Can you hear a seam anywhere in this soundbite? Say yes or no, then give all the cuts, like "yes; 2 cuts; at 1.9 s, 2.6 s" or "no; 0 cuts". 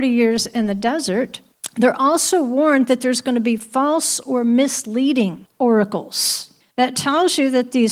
no; 0 cuts